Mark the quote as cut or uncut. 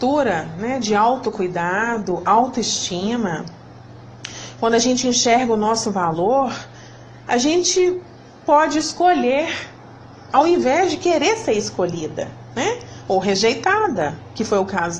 uncut